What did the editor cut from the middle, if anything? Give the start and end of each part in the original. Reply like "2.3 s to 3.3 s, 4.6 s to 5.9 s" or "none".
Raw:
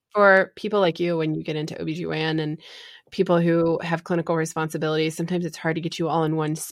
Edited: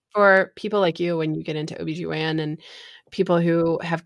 none

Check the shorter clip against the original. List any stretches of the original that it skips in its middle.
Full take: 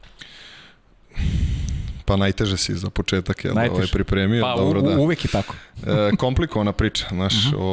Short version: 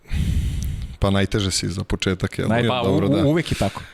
3.7 s to 4.4 s

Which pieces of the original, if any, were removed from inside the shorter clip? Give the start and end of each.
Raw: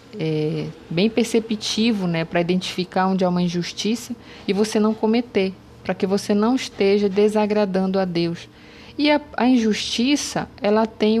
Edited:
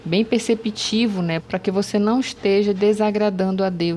2.3 s to 5.8 s

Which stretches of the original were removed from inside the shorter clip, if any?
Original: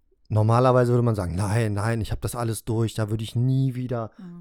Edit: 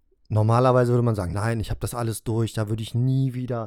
1.3 s to 1.7 s

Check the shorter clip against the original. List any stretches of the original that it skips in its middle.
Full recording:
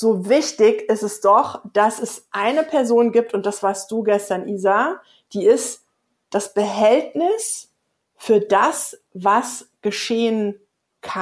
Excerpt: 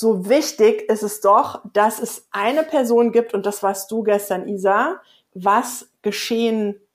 5.3 s to 9.1 s

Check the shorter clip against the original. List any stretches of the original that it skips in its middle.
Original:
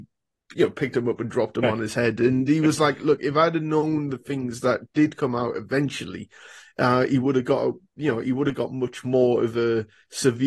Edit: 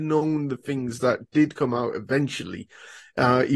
none

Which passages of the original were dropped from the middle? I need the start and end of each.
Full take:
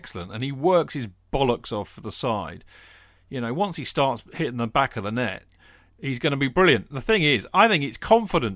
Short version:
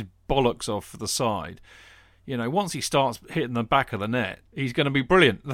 5.5 s to 5.9 s

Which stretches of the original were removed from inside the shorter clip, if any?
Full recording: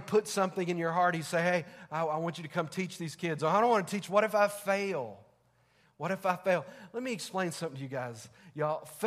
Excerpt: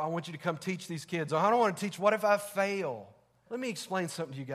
5.6 s to 6.9 s

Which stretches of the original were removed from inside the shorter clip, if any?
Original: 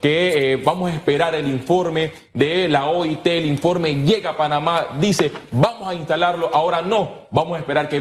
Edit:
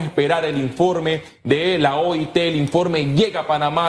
none

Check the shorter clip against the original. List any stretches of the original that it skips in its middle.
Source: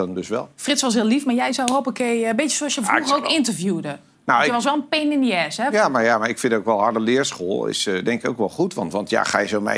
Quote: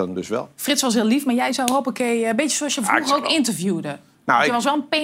none

